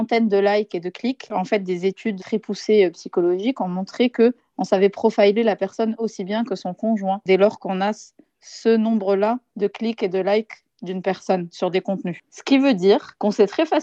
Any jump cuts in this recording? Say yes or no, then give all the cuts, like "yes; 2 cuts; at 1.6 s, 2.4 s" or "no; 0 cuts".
yes; 1 cut; at 2.2 s